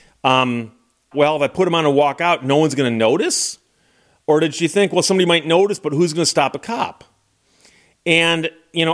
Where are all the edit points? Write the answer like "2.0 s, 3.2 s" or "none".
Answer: 1.1 s